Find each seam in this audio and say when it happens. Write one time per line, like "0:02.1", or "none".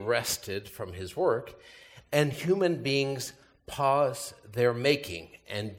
none

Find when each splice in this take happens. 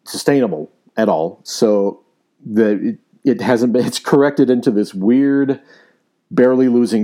0:01.4

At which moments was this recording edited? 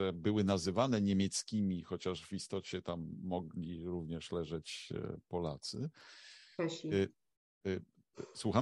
none

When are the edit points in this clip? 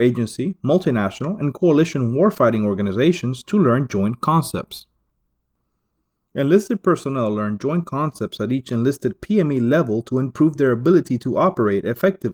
none

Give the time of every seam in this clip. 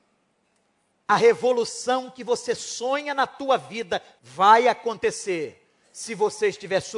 0:00.9
0:04.2

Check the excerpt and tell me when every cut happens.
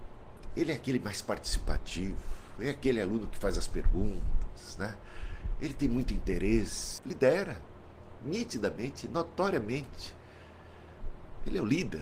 0:07.0

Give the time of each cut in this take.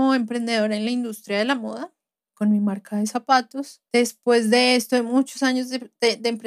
0:03.9

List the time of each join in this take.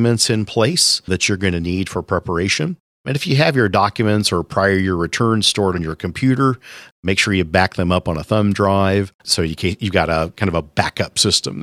0:01.1
0:02.9
0:09.2

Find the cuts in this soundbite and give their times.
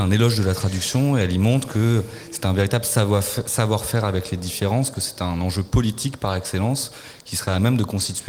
none

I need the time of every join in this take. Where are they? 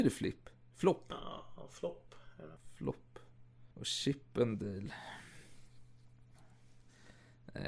0:02.6
0:03.7

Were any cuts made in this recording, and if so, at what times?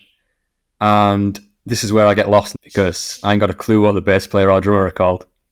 0:02.5

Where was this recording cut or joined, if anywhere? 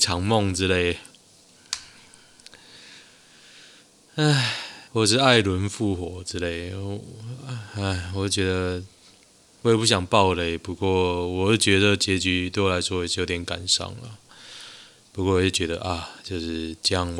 0:04.9

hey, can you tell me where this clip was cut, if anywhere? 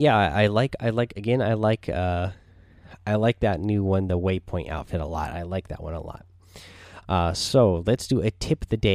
0:07.0

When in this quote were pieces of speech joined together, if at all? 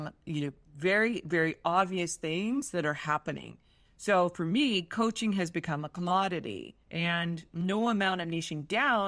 0:03.8
0:06.8

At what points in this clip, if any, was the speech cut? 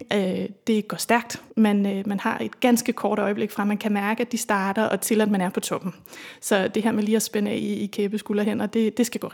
0:01.5

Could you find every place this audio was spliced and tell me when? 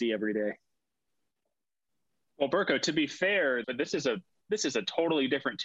0:03.6

